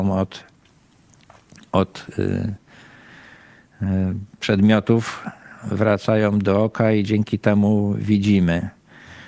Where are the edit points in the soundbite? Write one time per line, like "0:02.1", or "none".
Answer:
none